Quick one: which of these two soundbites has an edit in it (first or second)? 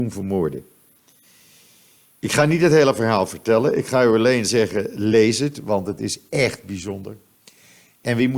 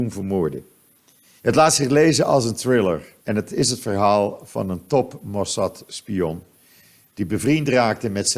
second